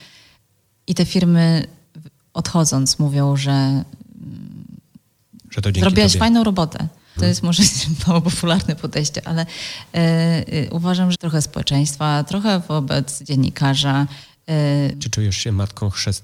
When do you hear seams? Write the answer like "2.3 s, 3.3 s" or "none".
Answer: 7.2 s, 11.1 s, 14.9 s